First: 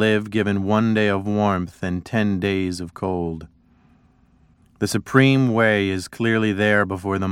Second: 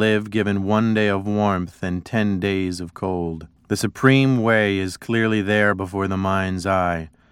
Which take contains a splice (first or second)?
second